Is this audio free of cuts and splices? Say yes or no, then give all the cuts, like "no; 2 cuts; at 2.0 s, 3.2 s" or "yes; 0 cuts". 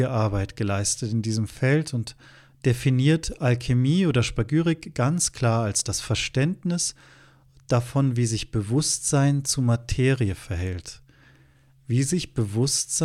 yes; 0 cuts